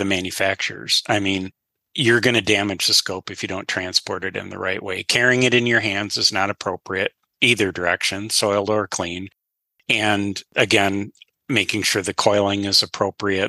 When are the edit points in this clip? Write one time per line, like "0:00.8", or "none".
none